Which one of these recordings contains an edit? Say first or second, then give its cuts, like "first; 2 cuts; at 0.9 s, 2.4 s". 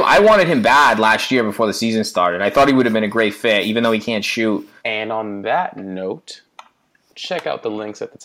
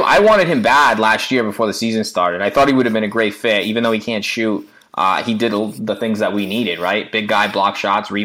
first; 1 cut; at 4.8 s